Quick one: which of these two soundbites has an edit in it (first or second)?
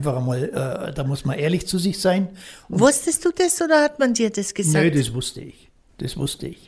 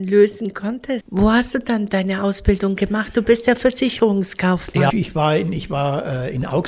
second